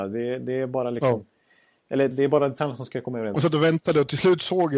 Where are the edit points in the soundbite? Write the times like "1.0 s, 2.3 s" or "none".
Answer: 2.1 s, 3.3 s